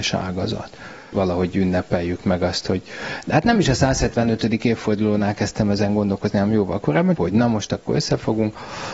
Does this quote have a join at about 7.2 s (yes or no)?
yes